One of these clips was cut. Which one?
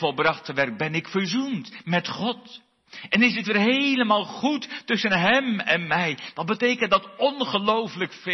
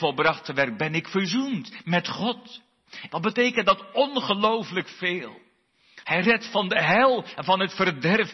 second; 2 cuts; at 3.1 s, 6.0 s

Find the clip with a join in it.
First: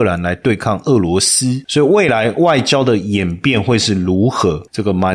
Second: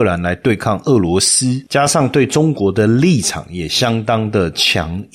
first; 1 cut; at 1.7 s

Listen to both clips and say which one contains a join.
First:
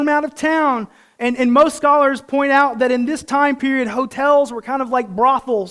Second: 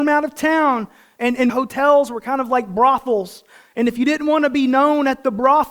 second; 1 cut; at 1.5 s

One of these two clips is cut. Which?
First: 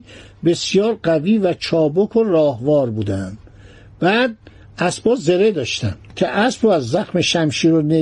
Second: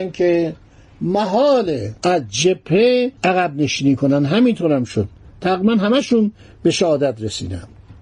second; 2 cuts; at 2.0 s, 3.2 s

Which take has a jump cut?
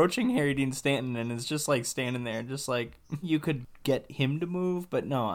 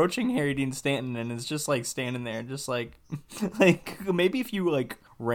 first; 1 cut; at 3.2 s

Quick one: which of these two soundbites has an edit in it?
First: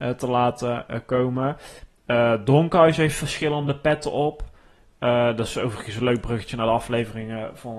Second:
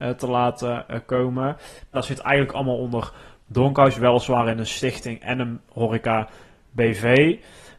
second; 1 cut; at 1.9 s

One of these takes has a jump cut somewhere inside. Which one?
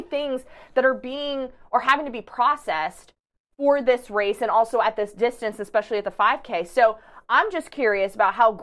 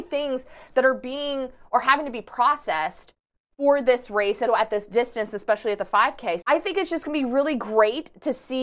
second; 2 cuts; at 4.5 s, 6.4 s

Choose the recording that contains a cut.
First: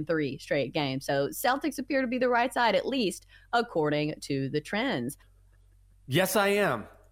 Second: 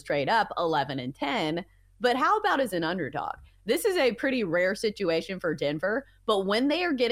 first; 1 cut; at 5.2 s

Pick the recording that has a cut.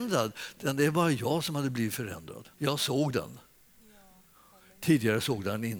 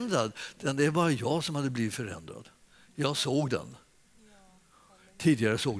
first; 1 cut; at 2.5 s

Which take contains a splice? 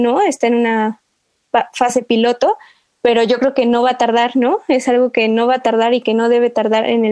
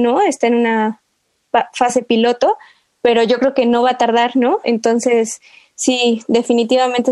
second; 1 cut; at 4.6 s

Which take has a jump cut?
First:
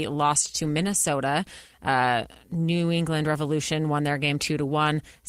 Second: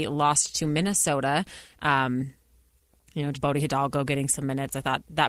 second; 2 cuts; at 1.7 s, 3.3 s

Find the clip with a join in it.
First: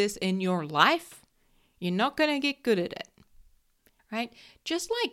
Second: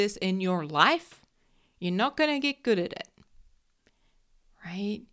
first; 1 cut; at 4.0 s

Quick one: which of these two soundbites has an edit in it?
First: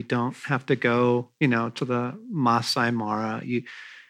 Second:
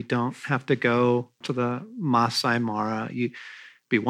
second; 1 cut; at 1.4 s

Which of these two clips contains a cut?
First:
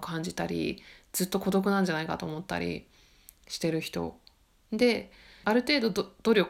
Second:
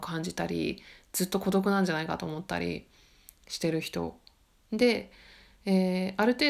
first; 1 cut; at 5.4 s

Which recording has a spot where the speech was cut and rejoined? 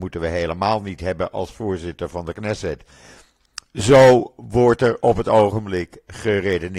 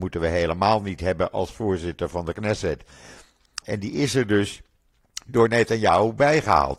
second; 1 cut; at 3.6 s

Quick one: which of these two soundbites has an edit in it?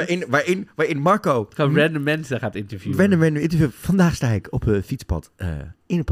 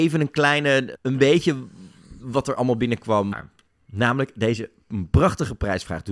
second; 2 cuts; at 0.9 s, 3.3 s

